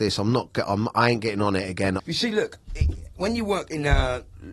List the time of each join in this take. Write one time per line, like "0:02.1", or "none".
0:02.0

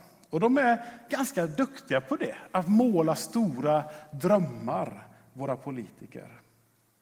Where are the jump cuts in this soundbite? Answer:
none

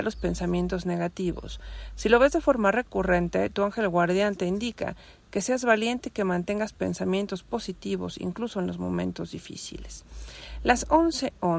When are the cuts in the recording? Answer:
none

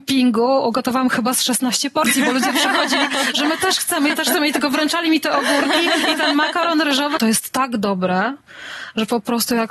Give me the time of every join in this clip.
0:07.2

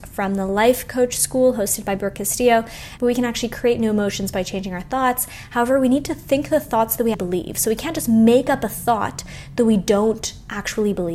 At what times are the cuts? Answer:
0:03.0
0:07.1

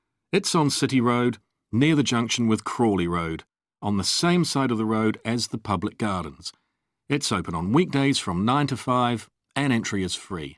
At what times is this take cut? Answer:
none

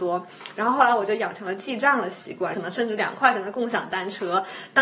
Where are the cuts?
0:02.5

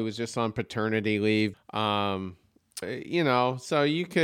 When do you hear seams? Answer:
0:01.5
0:02.8

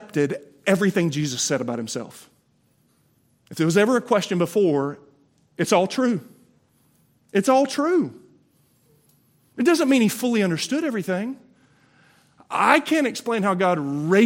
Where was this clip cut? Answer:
none

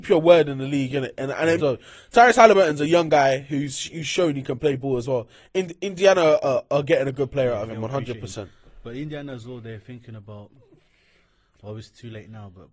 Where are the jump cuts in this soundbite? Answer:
0:01.6

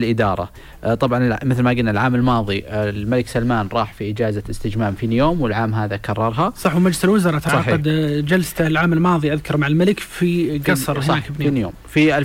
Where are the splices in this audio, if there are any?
0:07.5

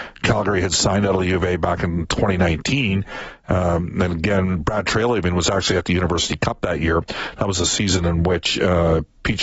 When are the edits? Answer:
none

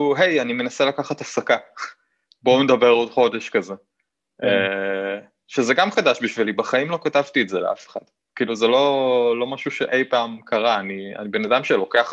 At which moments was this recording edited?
none

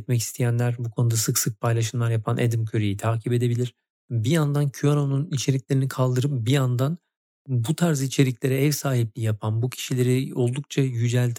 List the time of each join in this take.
0:04.0

